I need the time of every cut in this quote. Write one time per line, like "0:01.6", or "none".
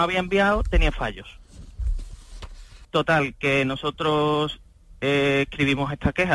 0:02.8

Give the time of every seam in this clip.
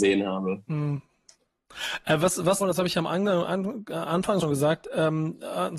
0:02.6
0:04.4

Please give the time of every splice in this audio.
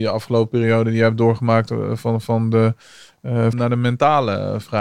0:03.5

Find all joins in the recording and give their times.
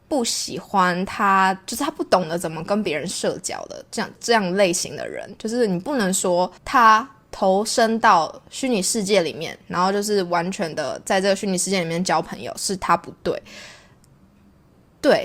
0:04.2
0:06.6

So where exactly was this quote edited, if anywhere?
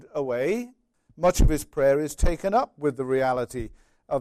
0:00.9

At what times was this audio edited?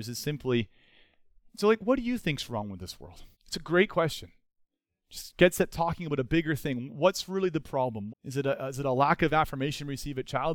0:03.3
0:08.1

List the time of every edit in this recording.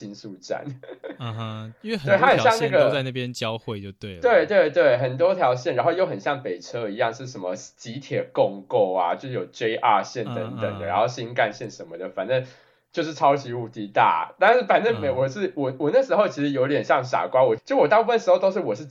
0:17.6

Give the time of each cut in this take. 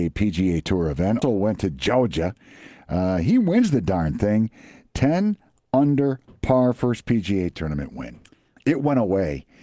0:01.2
0:08.6

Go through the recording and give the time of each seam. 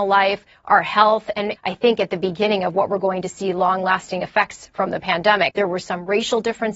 0:01.5
0:05.5

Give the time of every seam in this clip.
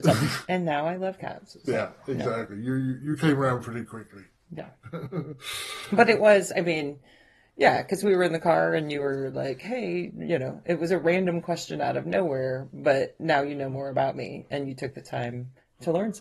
none

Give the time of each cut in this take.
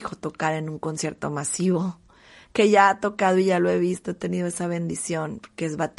none

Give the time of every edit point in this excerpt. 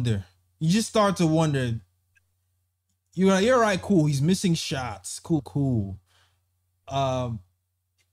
0:05.4

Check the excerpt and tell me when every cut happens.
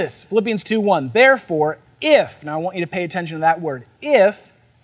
none

